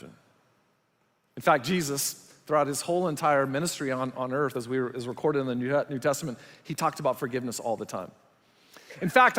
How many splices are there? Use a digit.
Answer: 0